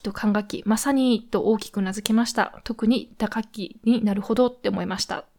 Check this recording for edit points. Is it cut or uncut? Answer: uncut